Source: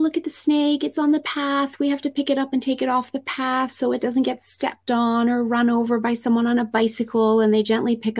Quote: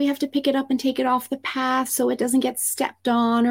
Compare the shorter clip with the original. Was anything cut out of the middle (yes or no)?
no